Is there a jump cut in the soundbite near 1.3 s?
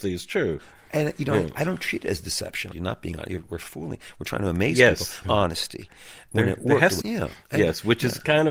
no; 3 cuts; at 2.7 s, 5.2 s, 7.0 s

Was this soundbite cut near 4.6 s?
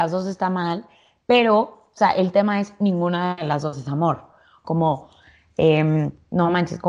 yes; 1 cut; at 4.6 s

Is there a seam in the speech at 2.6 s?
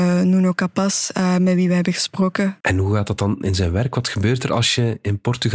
yes; 1 cut; at 2.6 s

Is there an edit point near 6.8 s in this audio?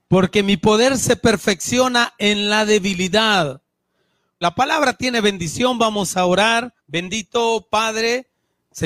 yes; 2 cuts; at 4.4 s, 6.8 s

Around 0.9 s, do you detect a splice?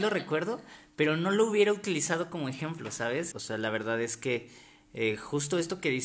no; 1 cut; at 3.3 s

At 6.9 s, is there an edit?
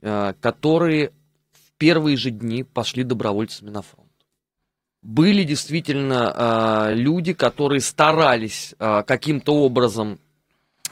no; 0 cuts

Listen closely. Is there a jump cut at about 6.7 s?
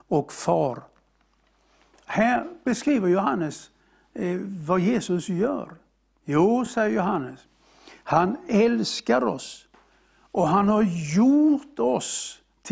no; 0 cuts

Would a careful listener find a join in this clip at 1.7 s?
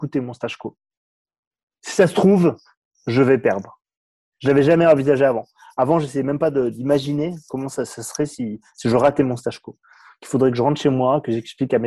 no; 0 cuts

